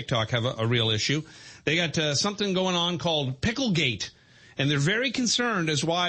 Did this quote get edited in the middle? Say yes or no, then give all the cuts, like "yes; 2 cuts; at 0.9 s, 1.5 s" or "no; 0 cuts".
no; 0 cuts